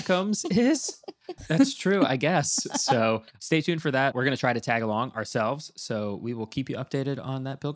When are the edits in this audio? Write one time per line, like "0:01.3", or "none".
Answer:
0:01.4
0:04.1

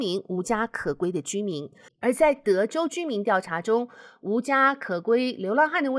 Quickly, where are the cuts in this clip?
0:01.9

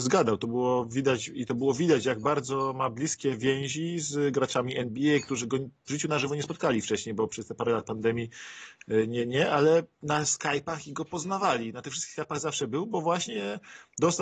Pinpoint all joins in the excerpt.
none

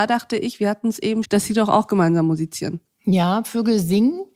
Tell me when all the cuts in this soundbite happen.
0:01.2

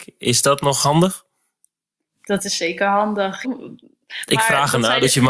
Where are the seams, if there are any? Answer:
0:03.4

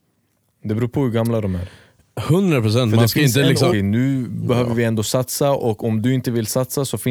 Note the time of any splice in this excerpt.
0:03.7

